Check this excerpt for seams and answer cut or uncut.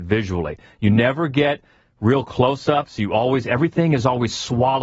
uncut